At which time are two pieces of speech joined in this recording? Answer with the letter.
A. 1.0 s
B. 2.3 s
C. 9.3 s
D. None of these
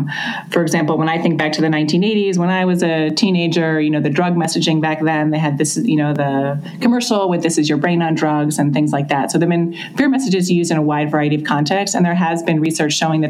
D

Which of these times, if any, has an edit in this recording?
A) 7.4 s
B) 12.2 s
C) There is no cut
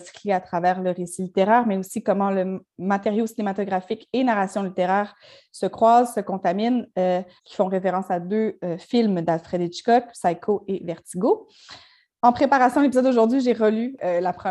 A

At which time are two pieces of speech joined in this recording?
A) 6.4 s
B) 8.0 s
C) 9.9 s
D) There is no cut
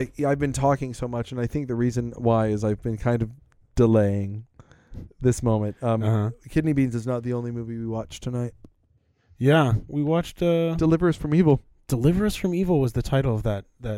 C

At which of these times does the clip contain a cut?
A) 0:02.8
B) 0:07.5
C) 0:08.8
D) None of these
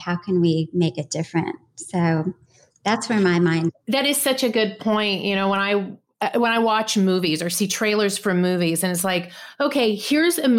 D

